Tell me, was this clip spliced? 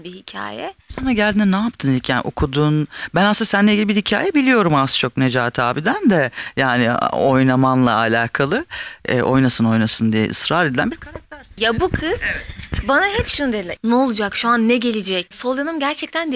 yes; 3 cuts; at 9.6 s, 13.8 s, 15.3 s

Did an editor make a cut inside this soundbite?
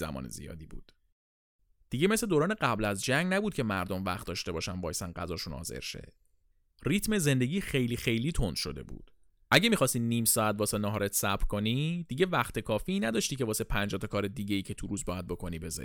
no; 0 cuts

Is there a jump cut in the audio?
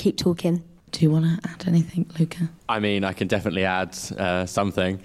yes; 1 cut; at 2.6 s

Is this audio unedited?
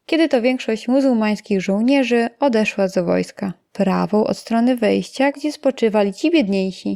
no; 2 cuts; at 3.7 s, 5.3 s

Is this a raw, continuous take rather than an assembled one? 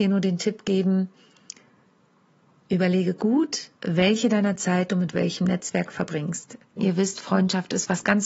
no; 2 cuts; at 3.7 s, 6.8 s

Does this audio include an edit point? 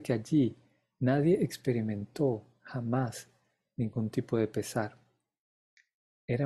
no; 0 cuts

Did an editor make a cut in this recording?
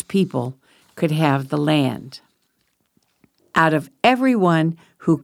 yes; 1 cut; at 3.4 s

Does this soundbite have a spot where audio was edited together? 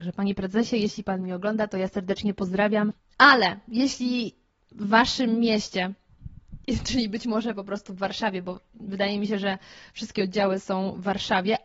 no; 0 cuts

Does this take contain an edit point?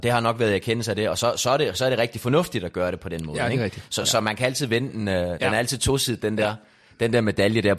no; 0 cuts

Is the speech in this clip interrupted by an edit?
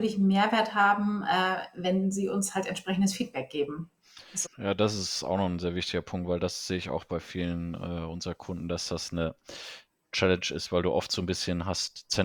yes; 1 cut; at 4.4 s

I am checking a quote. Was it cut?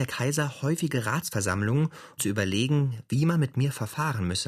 yes; 1 cut; at 2.2 s

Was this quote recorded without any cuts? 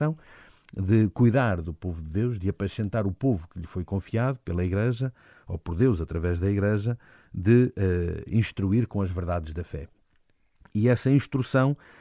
yes; 0 cuts

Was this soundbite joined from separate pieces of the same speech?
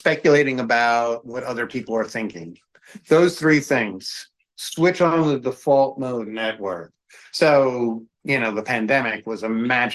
no; 0 cuts

